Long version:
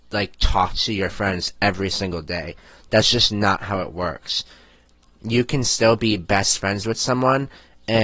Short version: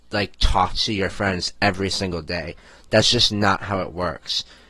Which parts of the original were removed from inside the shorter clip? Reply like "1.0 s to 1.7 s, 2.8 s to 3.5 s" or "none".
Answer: none

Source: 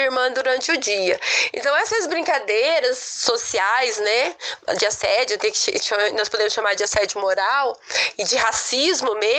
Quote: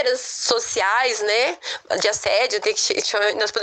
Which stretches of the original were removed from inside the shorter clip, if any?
none

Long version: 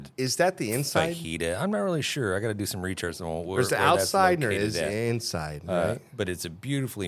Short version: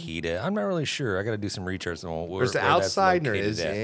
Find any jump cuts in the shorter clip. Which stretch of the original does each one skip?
none

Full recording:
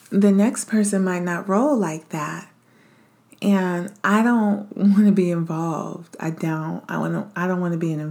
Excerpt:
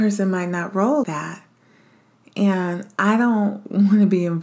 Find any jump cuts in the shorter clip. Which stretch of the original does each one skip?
1.8 s to 2.1 s

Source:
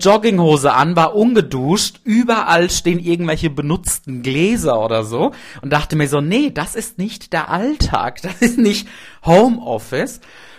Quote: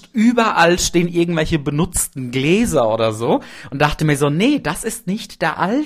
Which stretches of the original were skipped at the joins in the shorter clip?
none

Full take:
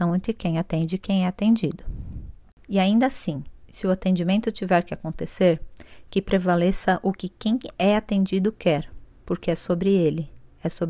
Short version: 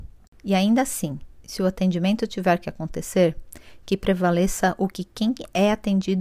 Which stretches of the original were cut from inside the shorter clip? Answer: none

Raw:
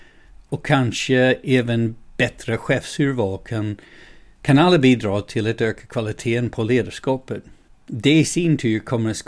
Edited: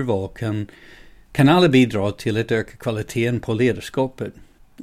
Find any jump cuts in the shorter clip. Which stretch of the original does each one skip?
none

